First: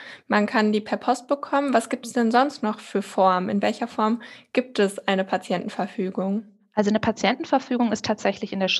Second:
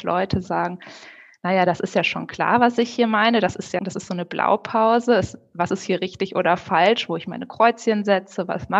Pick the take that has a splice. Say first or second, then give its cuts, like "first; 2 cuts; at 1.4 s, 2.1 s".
second; 1 cut; at 3.8 s